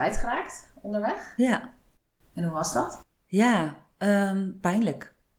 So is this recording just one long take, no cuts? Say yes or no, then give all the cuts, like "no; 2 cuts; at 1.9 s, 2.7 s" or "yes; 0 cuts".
yes; 0 cuts